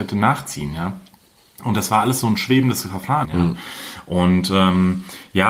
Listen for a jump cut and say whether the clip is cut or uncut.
cut